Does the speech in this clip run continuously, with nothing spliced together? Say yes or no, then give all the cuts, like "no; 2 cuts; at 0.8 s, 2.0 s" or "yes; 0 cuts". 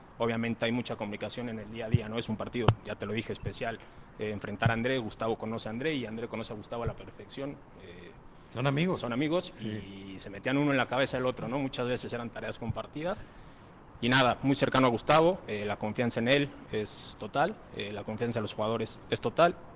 yes; 0 cuts